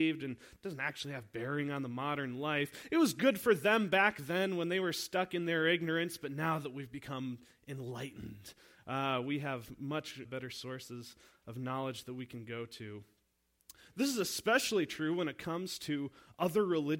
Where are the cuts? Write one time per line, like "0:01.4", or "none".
0:10.3
0:13.9

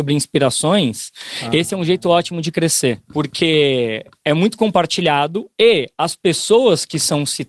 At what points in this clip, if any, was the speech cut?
none

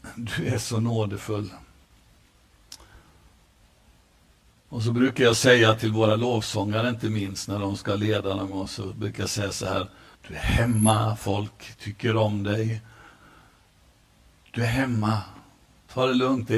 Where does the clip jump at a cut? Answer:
0:10.1

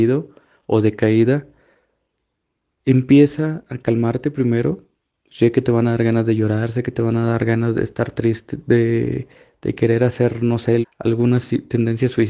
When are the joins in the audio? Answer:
0:10.8

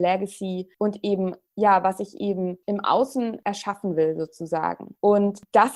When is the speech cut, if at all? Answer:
none

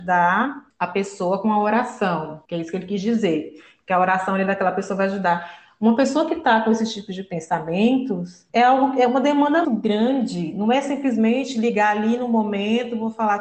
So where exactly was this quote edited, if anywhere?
0:09.6

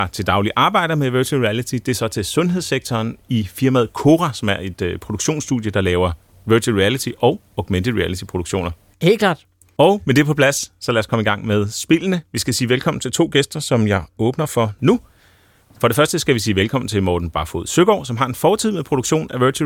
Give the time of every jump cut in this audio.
0:08.9

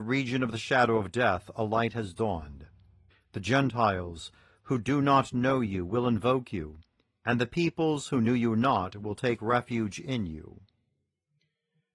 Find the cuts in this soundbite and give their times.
0:03.1

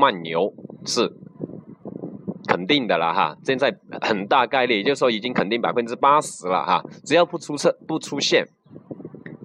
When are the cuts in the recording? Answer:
none

